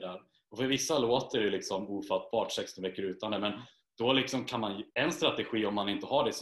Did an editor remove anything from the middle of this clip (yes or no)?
yes